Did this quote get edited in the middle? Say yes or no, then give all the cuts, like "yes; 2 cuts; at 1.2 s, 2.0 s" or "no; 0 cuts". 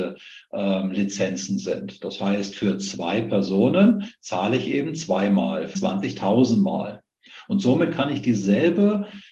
yes; 1 cut; at 5.7 s